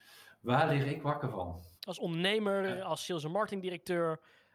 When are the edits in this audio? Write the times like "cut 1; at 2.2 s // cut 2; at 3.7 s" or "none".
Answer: cut 1; at 1.8 s